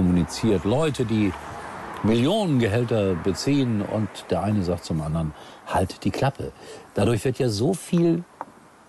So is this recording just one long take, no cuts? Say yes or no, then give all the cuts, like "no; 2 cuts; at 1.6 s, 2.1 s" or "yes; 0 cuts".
yes; 0 cuts